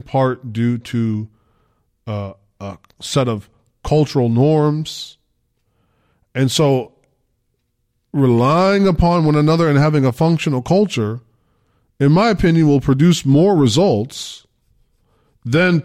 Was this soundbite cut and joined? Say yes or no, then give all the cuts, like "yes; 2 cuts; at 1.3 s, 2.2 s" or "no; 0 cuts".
no; 0 cuts